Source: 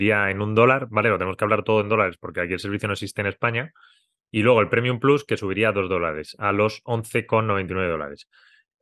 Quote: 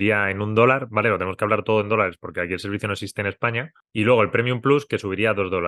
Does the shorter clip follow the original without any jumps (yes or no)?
no